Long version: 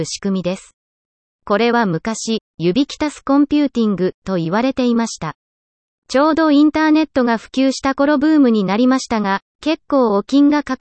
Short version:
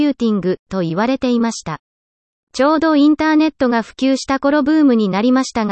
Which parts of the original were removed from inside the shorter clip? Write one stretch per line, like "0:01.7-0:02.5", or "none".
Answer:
none